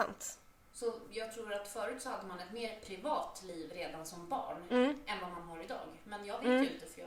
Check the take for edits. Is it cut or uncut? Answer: uncut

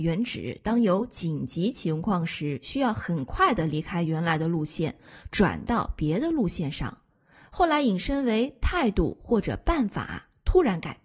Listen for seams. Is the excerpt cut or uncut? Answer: uncut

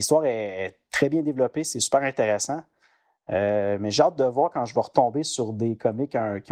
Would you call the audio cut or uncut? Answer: uncut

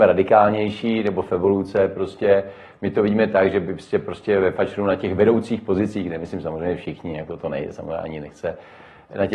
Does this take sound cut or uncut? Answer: uncut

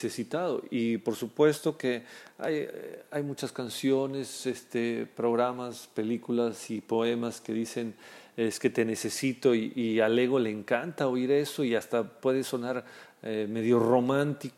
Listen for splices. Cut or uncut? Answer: uncut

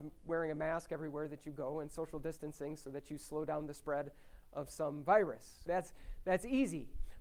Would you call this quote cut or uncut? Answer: cut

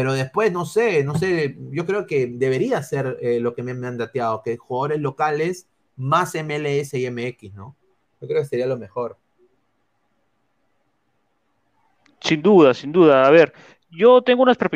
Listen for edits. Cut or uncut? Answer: uncut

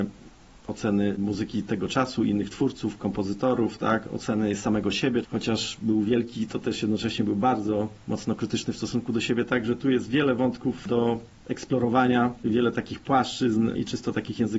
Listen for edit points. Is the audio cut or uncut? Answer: cut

